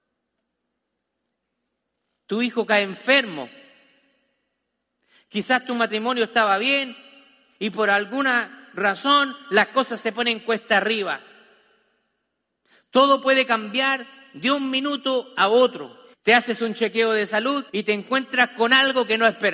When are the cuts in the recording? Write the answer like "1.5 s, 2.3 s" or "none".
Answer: 16.1 s, 17.7 s